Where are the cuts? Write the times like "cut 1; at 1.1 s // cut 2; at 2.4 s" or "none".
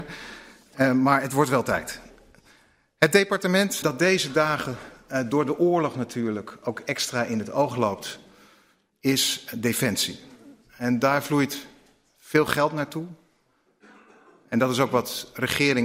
cut 1; at 3.8 s